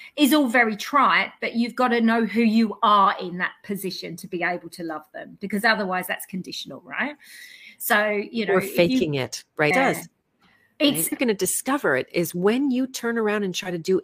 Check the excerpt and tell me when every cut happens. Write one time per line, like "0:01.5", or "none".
0:09.7
0:11.1